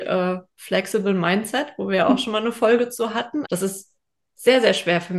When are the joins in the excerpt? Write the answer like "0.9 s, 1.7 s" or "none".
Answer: 3.4 s